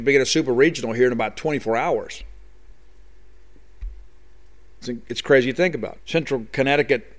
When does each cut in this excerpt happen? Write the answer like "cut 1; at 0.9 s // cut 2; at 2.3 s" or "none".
cut 1; at 6.0 s